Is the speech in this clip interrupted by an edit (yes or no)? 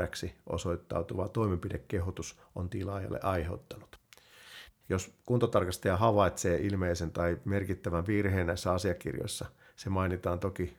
yes